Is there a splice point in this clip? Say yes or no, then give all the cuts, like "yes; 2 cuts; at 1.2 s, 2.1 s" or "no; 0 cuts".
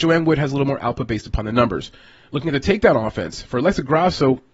no; 0 cuts